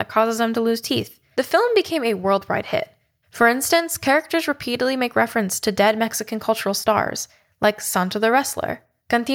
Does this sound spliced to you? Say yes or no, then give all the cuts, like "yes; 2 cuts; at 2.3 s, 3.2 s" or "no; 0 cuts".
yes; 2 cuts; at 1.3 s, 3.2 s